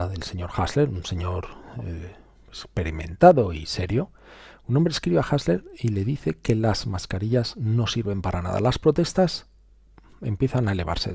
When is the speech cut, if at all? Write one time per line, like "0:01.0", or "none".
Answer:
none